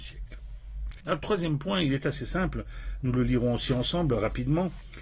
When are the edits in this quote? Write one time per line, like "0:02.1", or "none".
0:01.0

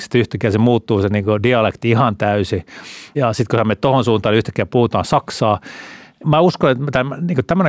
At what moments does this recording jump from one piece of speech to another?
none

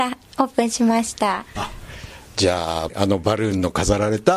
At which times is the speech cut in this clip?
0:01.5
0:02.9

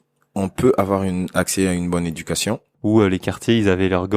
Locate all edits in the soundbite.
0:02.7

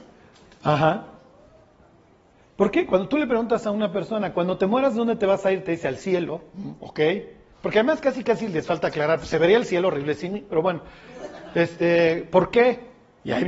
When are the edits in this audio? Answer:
none

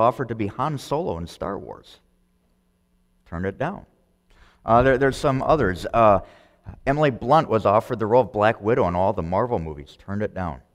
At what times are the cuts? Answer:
none

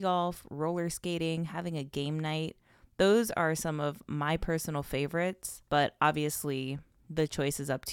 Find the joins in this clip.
0:05.7

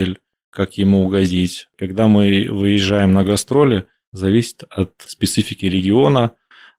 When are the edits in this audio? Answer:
none

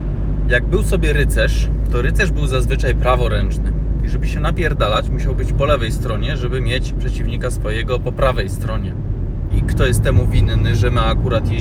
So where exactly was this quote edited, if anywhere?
0:09.5

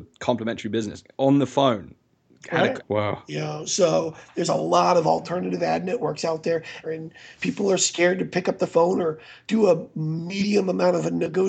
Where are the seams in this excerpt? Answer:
0:02.8
0:06.8

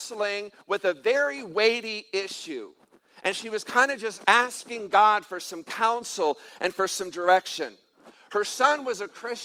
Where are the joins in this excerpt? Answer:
none

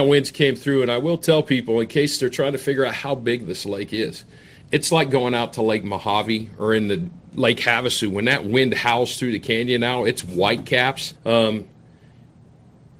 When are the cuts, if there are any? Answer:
0:04.5
0:11.1

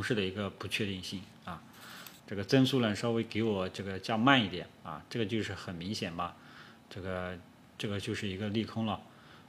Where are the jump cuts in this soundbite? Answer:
0:02.2

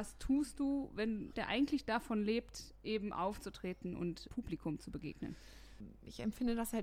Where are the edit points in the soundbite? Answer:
0:01.3
0:04.3

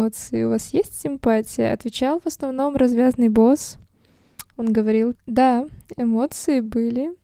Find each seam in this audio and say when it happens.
0:05.1

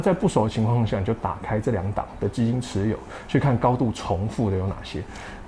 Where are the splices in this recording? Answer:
none

